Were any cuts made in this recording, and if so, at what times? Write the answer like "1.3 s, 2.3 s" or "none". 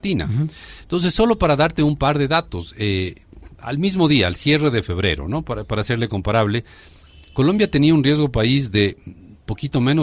none